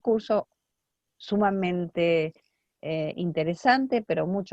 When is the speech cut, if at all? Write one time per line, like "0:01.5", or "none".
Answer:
none